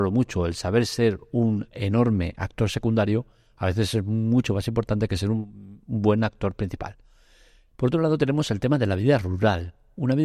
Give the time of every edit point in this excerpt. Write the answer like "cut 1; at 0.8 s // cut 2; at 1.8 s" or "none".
cut 1; at 7.7 s